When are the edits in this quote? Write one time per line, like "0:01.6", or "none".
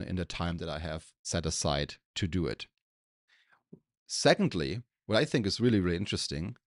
none